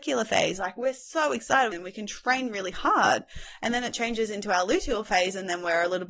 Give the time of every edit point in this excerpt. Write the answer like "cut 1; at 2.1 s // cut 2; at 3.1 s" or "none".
cut 1; at 1.7 s